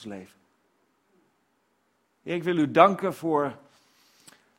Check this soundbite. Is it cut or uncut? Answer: uncut